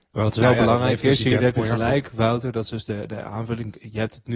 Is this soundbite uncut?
yes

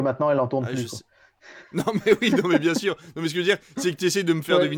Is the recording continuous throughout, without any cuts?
yes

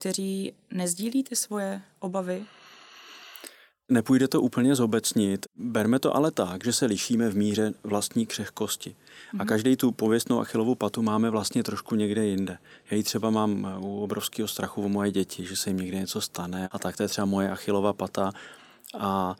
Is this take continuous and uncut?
yes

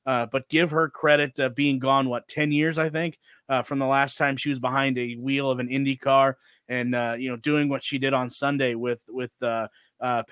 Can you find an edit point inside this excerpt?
no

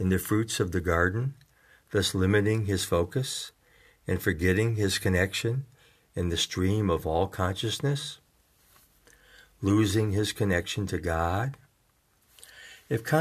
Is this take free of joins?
yes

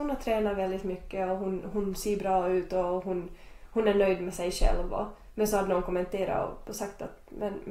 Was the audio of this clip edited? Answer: no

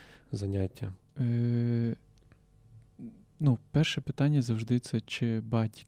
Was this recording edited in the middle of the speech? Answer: no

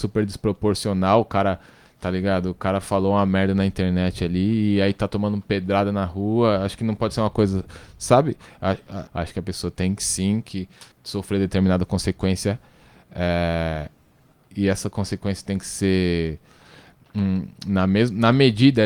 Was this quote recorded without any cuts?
no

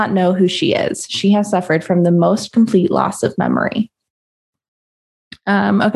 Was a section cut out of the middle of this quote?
no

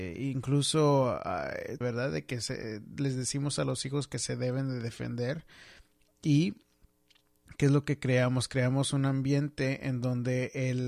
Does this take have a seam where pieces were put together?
yes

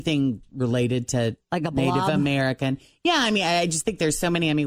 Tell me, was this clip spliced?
no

